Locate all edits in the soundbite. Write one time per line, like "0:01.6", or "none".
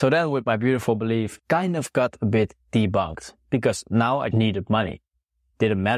0:01.4
0:04.3

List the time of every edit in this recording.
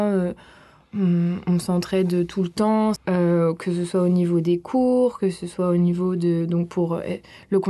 0:03.0

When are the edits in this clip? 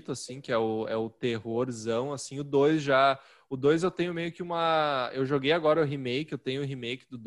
none

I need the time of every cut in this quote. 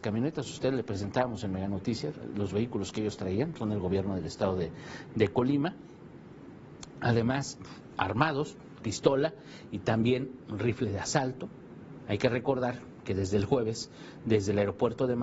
0:08.8
0:12.1

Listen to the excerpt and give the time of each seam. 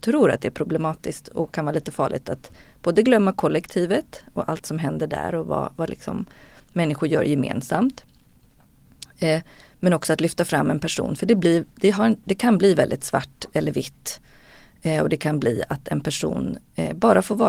none

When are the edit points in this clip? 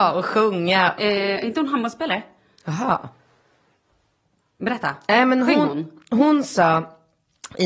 0:01.0

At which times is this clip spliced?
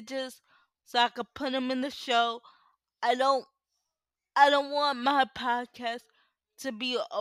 none

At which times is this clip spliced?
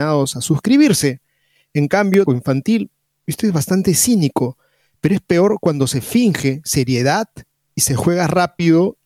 0:02.3

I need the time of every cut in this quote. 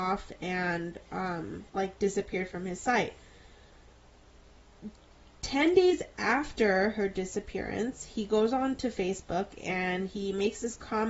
0:01.7

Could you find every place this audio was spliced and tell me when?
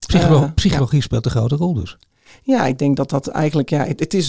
none

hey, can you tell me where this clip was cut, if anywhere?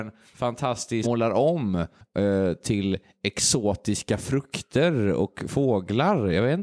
0:01.0

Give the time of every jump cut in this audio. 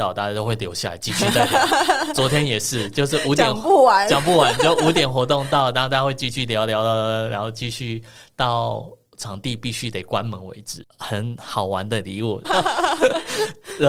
0:10.8
0:12.4

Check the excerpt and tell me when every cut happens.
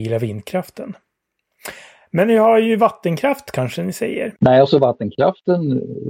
0:04.4

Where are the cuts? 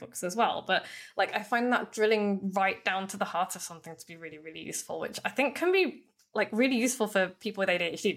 none

